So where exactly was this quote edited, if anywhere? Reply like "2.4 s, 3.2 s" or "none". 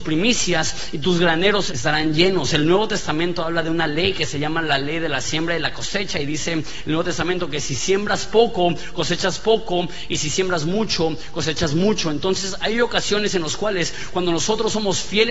1.7 s